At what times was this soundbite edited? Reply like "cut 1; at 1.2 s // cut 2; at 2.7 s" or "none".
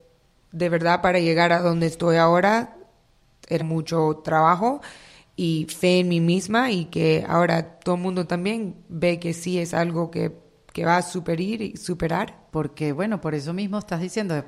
cut 1; at 3.6 s // cut 2; at 12.5 s